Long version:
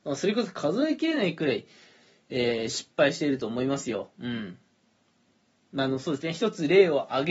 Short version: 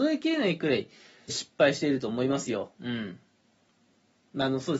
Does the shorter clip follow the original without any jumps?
no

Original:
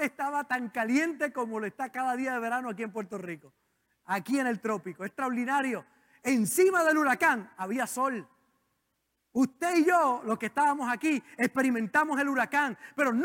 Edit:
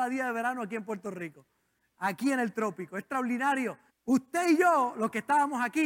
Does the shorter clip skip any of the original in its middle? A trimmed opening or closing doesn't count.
yes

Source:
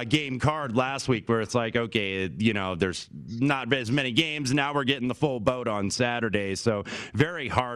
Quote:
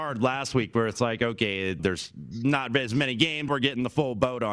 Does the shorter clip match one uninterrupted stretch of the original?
no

